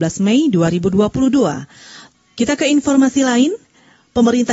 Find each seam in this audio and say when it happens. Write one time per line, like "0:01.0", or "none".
0:02.1